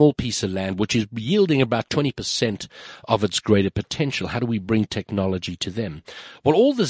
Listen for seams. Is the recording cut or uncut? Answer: uncut